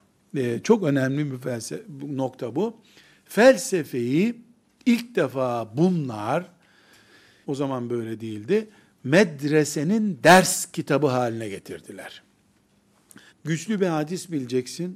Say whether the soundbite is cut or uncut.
cut